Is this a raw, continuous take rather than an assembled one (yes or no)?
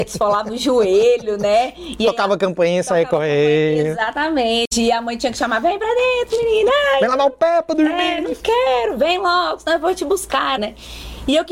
no